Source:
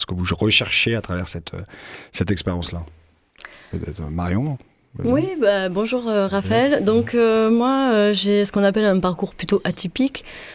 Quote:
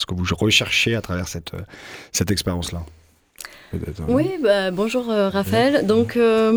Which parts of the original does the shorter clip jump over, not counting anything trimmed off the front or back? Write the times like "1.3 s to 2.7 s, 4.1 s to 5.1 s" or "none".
4.1 s to 5.1 s

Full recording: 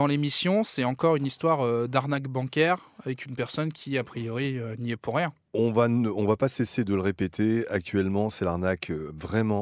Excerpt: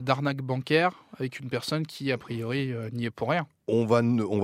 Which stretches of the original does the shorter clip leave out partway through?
none

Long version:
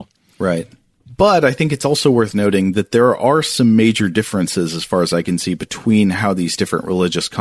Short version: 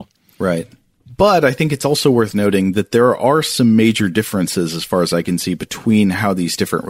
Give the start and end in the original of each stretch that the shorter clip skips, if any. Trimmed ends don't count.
none

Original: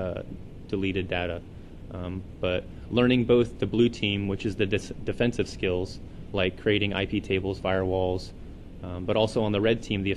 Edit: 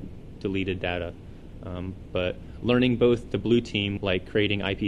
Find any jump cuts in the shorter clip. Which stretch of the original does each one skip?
4.3 s to 6.3 s

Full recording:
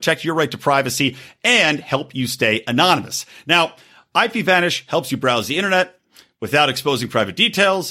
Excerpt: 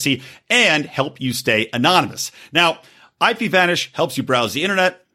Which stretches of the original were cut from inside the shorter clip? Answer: none

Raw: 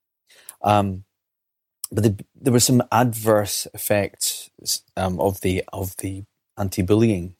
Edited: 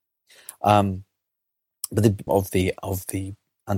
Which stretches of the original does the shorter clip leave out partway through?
2.3 s to 5.2 s

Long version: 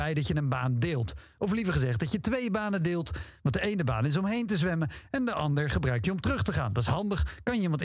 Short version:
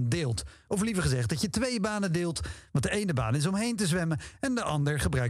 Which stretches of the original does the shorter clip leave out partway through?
none

